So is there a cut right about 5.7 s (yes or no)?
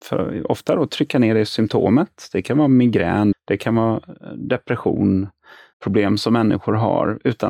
yes